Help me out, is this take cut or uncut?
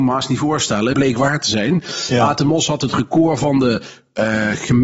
cut